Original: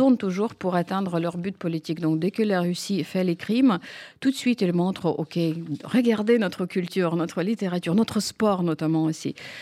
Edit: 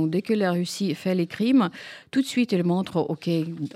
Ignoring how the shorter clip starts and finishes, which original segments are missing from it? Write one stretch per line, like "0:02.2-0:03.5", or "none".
none